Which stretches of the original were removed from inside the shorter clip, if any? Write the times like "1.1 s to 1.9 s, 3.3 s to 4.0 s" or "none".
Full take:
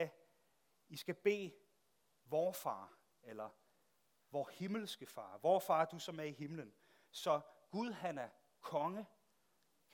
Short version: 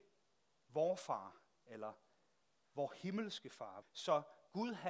5.4 s to 7.0 s